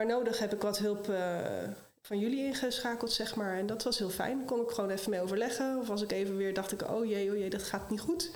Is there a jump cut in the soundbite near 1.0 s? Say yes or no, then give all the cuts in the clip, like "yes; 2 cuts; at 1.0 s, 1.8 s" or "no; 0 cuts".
no; 0 cuts